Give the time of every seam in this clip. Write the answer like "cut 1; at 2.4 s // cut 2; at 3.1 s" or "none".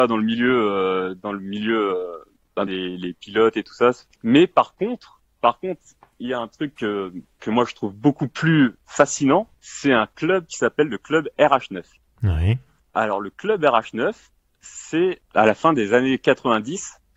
cut 1; at 2.7 s